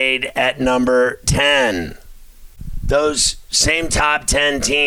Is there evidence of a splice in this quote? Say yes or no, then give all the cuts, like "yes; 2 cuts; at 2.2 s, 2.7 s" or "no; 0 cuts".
no; 0 cuts